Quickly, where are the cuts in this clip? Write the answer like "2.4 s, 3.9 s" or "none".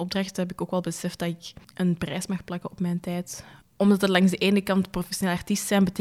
1.6 s, 3.6 s